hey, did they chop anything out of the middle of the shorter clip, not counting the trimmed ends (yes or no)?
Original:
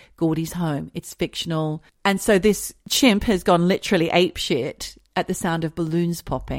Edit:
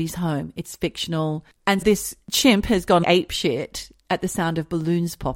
yes